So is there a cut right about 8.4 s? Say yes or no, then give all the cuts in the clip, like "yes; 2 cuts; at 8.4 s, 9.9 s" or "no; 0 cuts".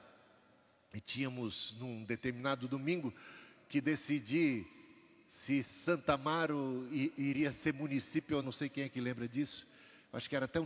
yes; 1 cut; at 8.4 s